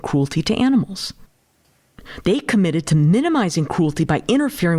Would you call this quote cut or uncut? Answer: cut